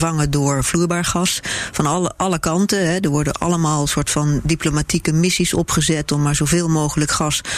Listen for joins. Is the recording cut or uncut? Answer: uncut